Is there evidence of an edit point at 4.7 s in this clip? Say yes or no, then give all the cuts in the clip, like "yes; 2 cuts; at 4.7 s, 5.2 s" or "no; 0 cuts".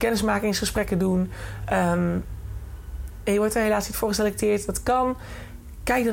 no; 0 cuts